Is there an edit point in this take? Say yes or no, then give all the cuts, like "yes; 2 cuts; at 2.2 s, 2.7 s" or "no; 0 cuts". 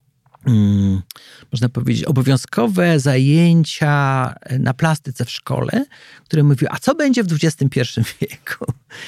no; 0 cuts